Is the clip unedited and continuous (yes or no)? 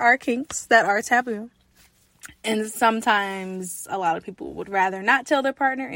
yes